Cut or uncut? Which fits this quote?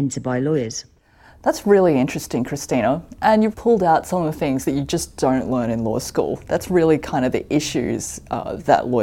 cut